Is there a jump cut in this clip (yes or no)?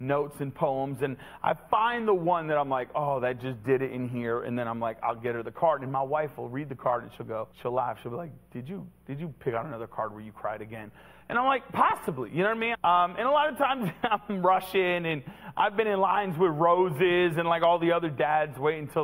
yes